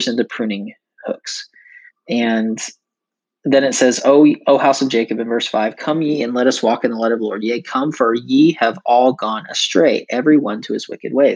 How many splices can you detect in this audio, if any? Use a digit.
1